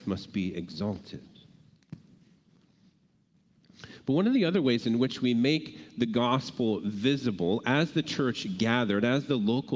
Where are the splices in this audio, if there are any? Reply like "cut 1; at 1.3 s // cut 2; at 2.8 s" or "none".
none